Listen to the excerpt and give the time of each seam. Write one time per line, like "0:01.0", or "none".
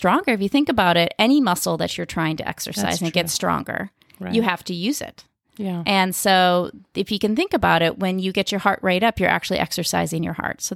none